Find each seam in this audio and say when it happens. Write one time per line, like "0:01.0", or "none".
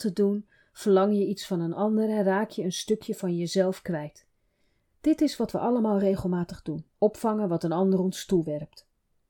0:04.8
0:06.9